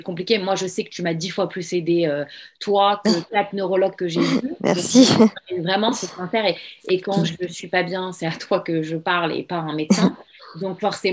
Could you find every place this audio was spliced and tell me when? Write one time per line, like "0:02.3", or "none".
none